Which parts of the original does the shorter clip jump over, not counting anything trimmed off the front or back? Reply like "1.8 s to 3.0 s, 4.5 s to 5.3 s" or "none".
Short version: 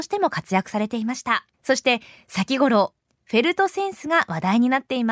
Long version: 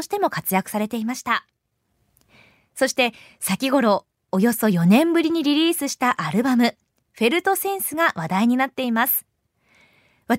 1.5 s to 2.7 s, 4.2 s to 6.9 s